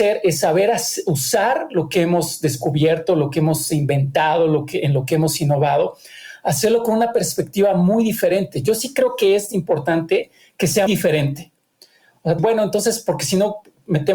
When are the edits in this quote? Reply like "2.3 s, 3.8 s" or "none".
10.9 s, 12.4 s